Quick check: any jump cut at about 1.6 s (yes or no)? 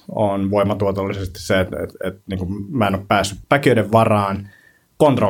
no